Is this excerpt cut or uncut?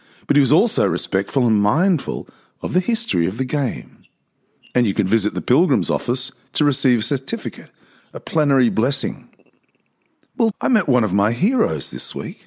cut